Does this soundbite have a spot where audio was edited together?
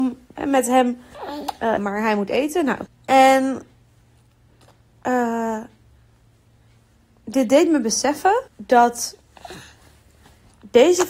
yes; 3 cuts; at 1.8 s, 2.9 s, 8.5 s

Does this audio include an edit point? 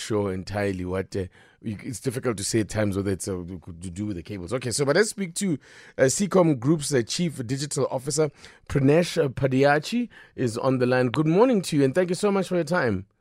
no; 0 cuts

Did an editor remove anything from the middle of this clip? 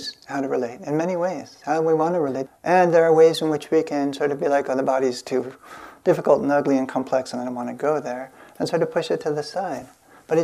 yes; 1 cut; at 2.5 s

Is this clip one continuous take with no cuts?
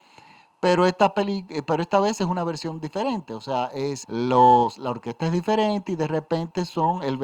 no; 1 cut; at 4.0 s

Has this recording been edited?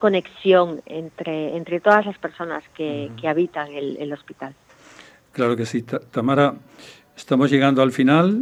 no; 0 cuts

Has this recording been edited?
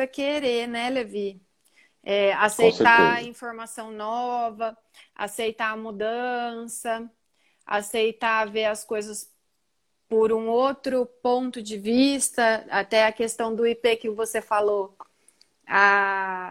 no; 0 cuts

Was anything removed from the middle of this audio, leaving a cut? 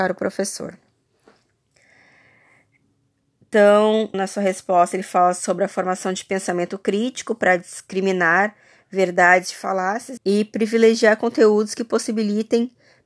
yes; 2 cuts; at 4.1 s, 10.2 s

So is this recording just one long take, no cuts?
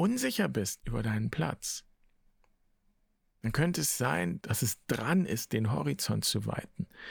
no; 1 cut; at 4.4 s

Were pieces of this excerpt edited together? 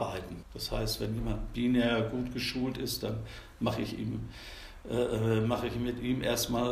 no; 0 cuts

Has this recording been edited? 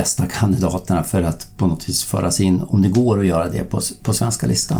yes; 1 cut; at 2.7 s

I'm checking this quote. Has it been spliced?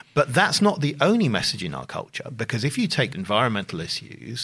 yes; 1 cut; at 3.1 s

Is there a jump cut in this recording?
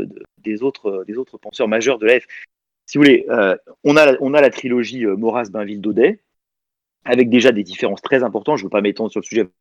no; 0 cuts

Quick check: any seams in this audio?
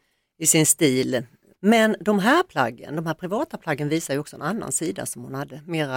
yes; 1 cut; at 1.5 s

